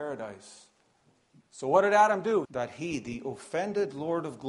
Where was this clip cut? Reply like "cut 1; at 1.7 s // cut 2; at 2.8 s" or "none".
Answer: cut 1; at 1.4 s // cut 2; at 2.4 s